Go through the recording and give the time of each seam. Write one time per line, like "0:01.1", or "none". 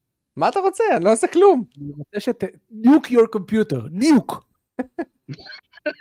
none